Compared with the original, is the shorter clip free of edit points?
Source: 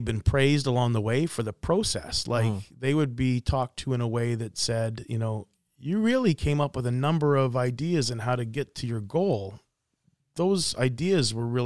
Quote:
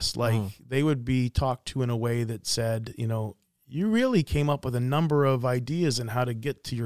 yes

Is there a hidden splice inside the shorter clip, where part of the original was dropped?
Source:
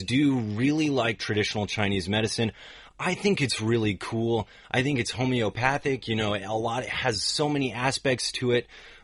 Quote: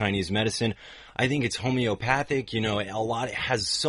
yes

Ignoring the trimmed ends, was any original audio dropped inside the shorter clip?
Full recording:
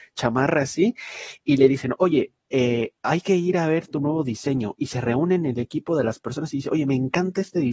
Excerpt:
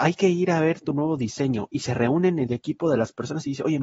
no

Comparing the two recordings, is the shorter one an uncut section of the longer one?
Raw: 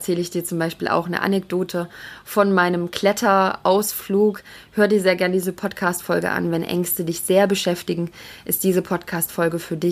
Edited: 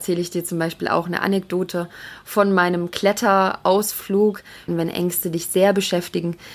no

